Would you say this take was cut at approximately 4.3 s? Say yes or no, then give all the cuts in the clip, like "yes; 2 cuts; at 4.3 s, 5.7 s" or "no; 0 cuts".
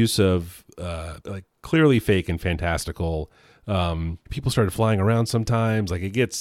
yes; 2 cuts; at 1.2 s, 4.3 s